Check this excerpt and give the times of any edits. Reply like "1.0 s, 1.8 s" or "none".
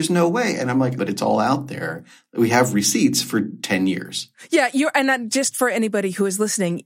1.0 s